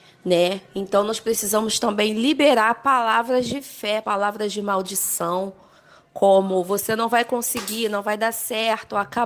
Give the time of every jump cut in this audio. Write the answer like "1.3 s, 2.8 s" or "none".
4.0 s

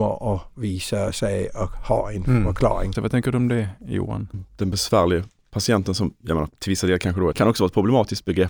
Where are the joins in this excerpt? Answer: 2.9 s, 4.3 s, 7.3 s

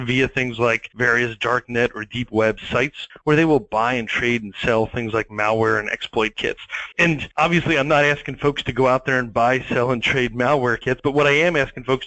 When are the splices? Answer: none

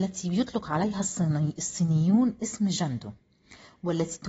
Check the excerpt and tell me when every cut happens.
none

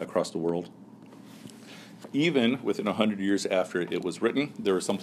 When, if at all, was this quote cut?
none

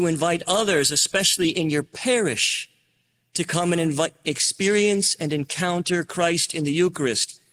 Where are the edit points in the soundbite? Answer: none

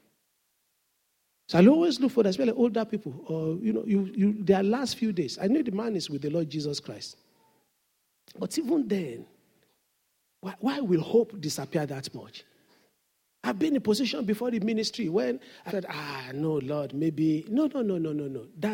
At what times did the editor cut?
15.7 s

